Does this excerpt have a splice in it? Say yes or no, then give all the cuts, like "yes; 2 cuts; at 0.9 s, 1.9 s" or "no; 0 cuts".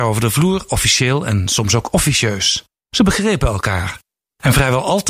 no; 0 cuts